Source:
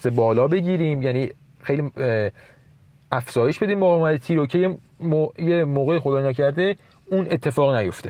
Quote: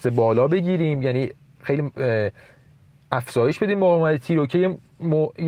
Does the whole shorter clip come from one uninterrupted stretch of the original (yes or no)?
yes